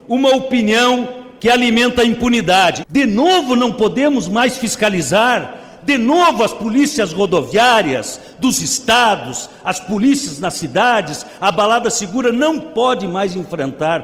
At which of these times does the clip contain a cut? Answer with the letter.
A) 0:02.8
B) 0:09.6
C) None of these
A